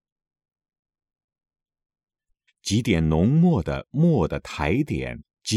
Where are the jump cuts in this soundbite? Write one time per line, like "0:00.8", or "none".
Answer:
0:02.5